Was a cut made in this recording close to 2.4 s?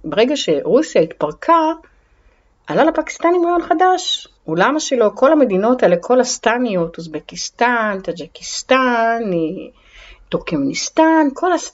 no; 1 cut; at 4.4 s

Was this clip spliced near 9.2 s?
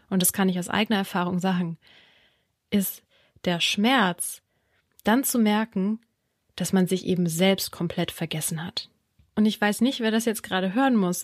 yes; 1 cut; at 9.2 s

